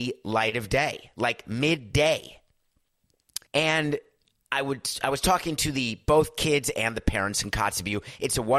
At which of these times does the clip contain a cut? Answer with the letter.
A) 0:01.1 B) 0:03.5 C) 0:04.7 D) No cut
B